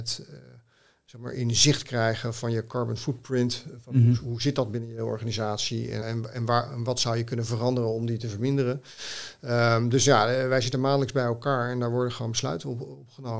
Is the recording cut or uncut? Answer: cut